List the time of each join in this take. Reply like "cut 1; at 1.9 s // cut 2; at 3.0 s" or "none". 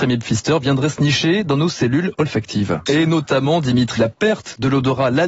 cut 1; at 2.9 s // cut 2; at 4.0 s